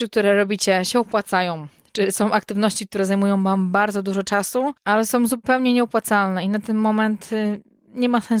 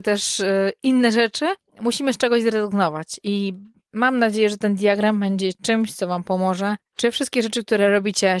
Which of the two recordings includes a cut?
first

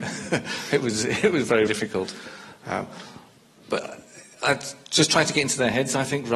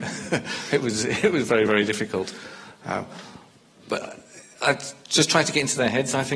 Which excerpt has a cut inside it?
first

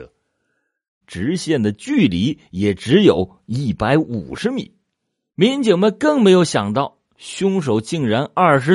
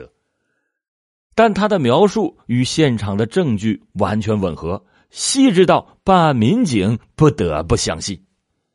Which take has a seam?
first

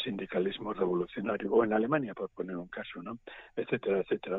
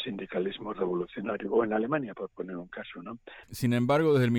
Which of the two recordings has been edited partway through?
second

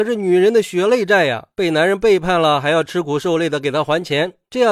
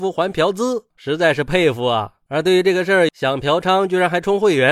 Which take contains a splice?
second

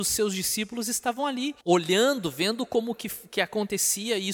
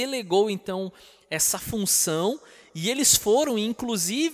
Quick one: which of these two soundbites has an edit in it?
first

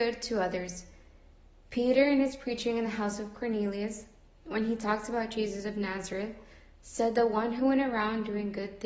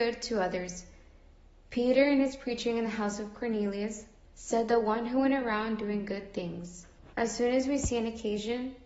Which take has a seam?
second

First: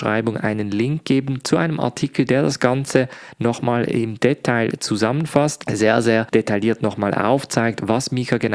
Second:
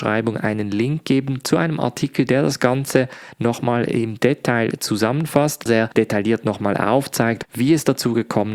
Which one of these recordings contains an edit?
second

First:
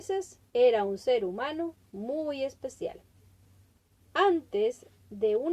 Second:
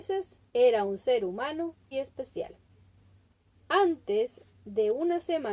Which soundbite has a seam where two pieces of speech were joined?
second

